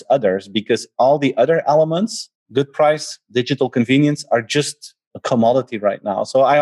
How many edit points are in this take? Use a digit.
1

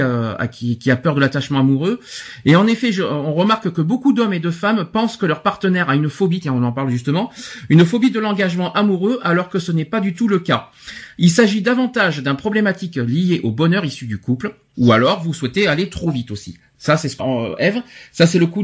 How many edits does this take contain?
2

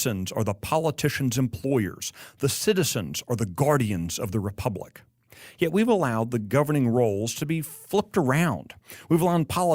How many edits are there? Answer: 0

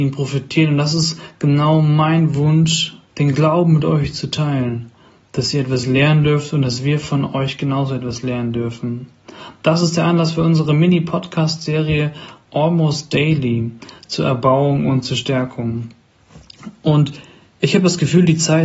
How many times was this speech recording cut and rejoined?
1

